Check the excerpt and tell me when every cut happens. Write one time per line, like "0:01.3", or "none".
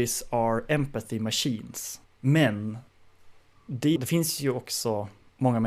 0:02.0
0:04.0